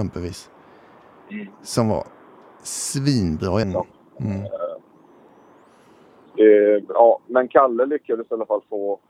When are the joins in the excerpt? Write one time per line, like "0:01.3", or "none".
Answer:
0:03.6